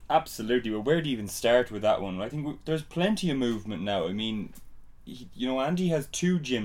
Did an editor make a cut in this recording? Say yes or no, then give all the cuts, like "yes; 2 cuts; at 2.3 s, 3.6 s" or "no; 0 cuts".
no; 0 cuts